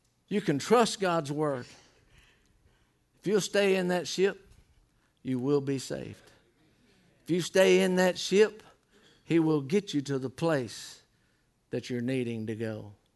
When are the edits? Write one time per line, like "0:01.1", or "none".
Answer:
none

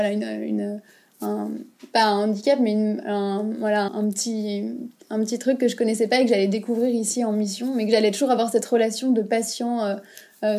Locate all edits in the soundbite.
0:03.9

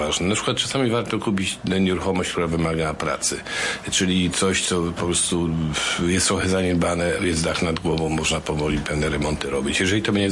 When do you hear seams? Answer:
none

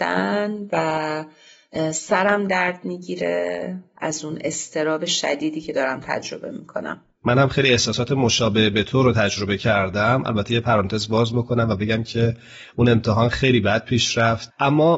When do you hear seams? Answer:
none

